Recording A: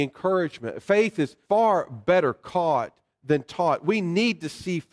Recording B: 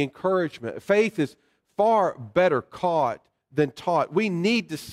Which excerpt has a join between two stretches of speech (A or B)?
A